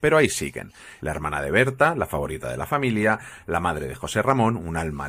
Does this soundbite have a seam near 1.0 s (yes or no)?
yes